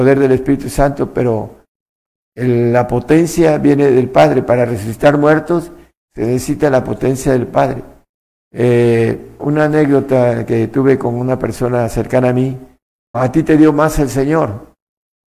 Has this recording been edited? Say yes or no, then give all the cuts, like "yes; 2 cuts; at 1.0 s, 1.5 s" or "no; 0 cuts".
yes; 3 cuts; at 8.3 s, 9.4 s, 13.1 s